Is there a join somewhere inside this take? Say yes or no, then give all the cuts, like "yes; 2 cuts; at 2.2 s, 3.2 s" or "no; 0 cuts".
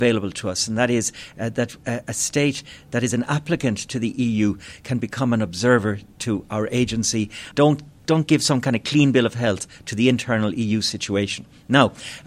yes; 1 cut; at 7.5 s